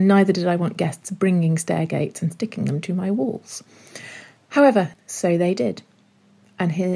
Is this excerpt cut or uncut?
cut